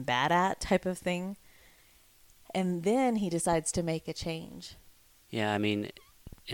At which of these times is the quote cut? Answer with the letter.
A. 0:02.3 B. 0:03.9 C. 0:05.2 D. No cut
C